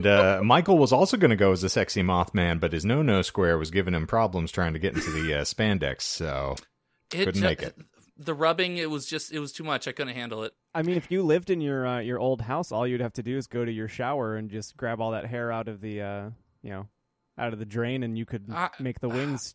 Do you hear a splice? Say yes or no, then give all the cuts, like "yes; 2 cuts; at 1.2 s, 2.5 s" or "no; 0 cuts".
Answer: no; 0 cuts